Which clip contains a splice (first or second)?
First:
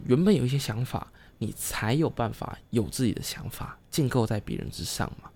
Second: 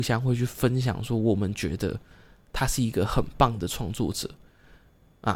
first